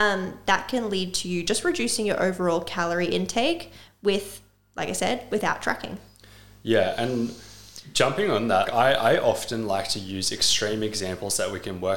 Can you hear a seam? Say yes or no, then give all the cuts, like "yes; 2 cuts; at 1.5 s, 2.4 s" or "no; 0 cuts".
yes; 1 cut; at 8.6 s